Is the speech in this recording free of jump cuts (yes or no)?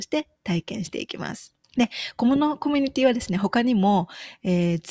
no